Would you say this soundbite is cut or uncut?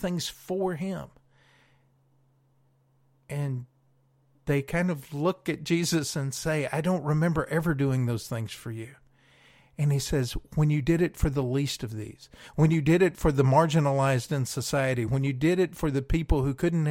uncut